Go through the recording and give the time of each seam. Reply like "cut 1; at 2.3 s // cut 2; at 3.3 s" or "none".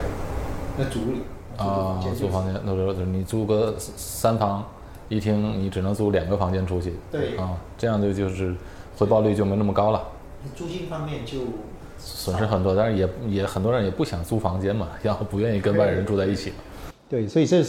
none